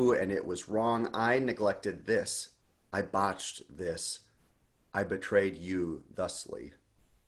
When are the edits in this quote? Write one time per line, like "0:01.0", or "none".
none